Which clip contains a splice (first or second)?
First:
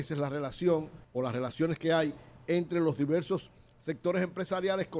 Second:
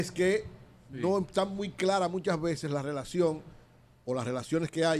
first